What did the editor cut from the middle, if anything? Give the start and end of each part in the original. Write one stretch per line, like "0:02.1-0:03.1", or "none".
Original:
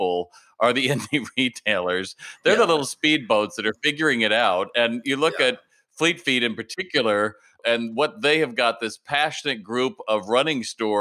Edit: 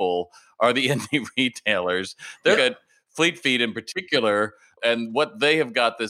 0:02.6-0:05.4